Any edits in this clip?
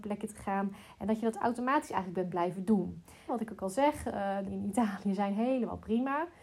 yes; 2 cuts; at 3.3 s, 4.5 s

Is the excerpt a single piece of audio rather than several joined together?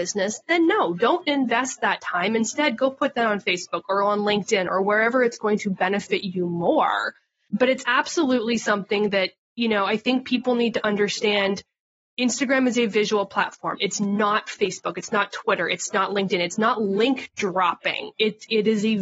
yes; 0 cuts

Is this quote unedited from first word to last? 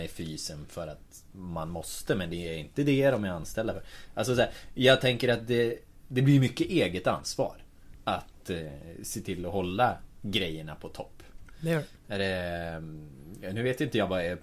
yes; 0 cuts

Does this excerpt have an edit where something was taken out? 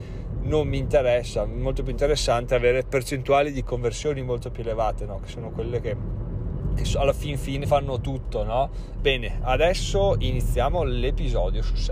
yes; 2 cuts; at 7.6 s, 9.0 s

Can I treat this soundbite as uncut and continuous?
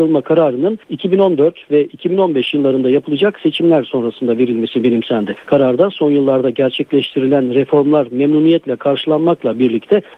yes; 0 cuts

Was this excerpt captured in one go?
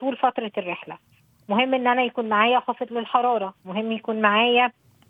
yes; 0 cuts

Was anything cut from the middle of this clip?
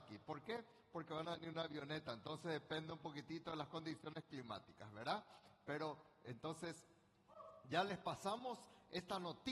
no; 0 cuts

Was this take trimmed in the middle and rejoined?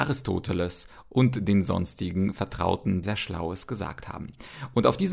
yes; 1 cut; at 3.0 s

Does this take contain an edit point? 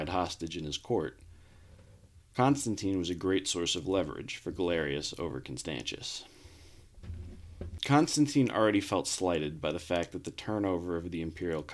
no; 0 cuts

